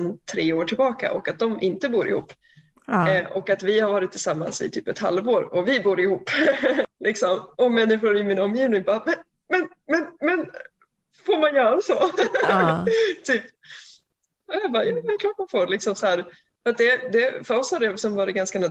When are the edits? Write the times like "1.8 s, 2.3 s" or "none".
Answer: none